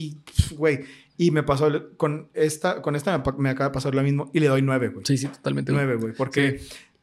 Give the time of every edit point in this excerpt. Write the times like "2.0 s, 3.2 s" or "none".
none